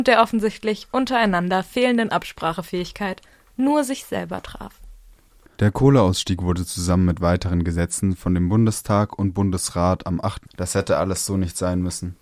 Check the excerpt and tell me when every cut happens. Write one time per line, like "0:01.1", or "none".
0:10.4